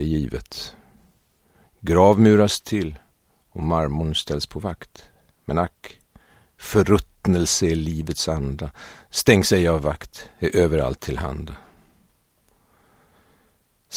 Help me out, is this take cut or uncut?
uncut